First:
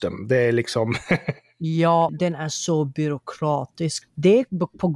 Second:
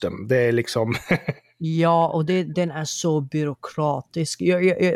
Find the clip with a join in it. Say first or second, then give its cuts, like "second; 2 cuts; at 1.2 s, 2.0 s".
first; 2 cuts; at 2.1 s, 4.0 s